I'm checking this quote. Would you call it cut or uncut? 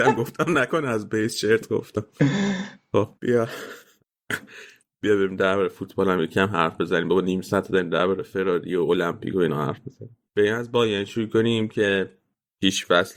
cut